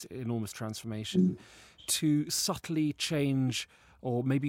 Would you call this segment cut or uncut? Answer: uncut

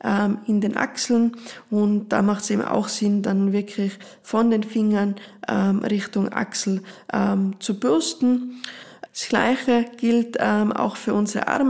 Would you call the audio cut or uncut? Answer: cut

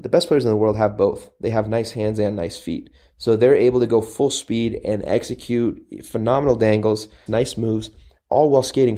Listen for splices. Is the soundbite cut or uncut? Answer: cut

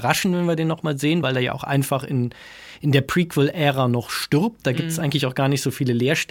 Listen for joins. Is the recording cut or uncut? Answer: uncut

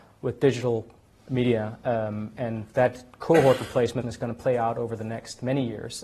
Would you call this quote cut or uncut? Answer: cut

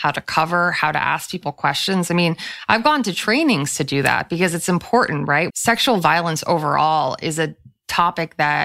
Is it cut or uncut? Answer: cut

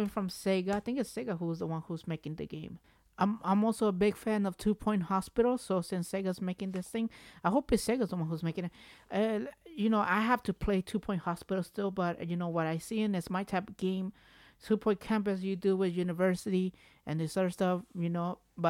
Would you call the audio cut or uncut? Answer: uncut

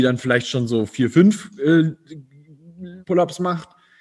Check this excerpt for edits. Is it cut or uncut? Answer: cut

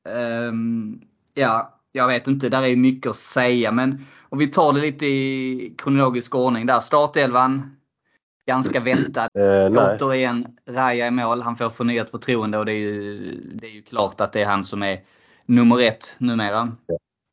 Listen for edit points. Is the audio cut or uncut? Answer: cut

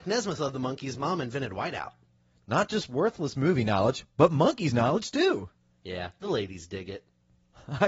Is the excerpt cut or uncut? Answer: uncut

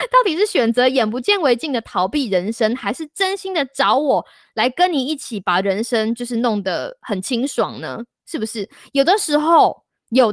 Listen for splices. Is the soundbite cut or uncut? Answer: uncut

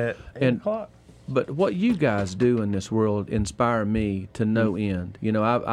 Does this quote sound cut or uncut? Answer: uncut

